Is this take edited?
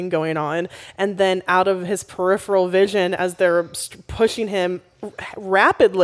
no; 0 cuts

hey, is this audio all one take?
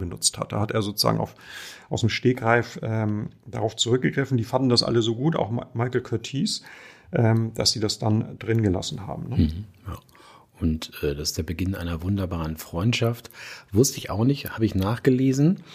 yes; 0 cuts

